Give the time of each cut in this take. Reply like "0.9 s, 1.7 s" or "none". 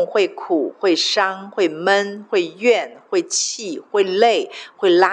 none